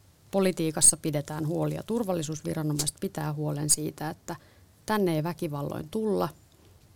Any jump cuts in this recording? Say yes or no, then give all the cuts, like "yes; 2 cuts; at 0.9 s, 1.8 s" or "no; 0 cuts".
no; 0 cuts